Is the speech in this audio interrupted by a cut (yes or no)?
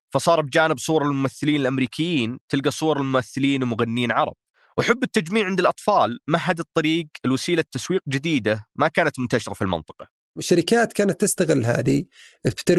no